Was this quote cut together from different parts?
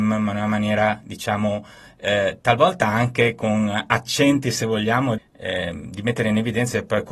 yes; 1 cut; at 5.2 s

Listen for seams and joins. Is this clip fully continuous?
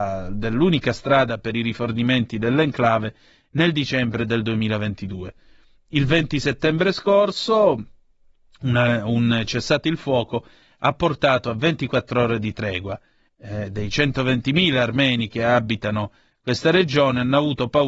no; 1 cut; at 13.3 s

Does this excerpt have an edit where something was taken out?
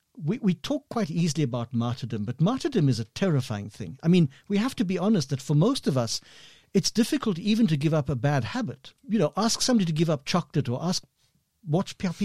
yes; 1 cut; at 9.0 s

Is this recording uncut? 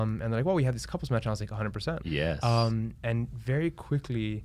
no; 1 cut; at 2.0 s

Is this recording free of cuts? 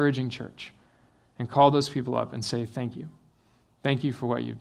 yes; 0 cuts

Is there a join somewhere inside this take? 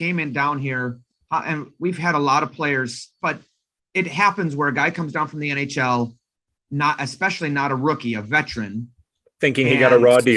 yes; 1 cut; at 3.2 s

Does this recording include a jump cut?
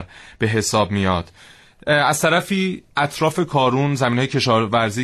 no; 0 cuts

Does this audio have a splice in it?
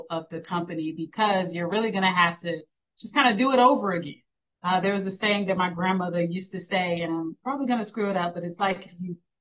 no; 0 cuts

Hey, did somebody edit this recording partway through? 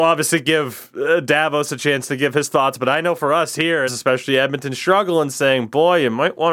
yes; 1 cut; at 3.9 s

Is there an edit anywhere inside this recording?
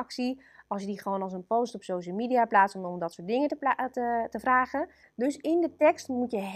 yes; 1 cut; at 5.0 s

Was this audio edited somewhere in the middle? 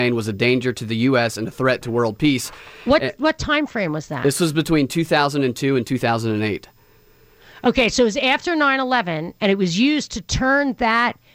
no; 0 cuts

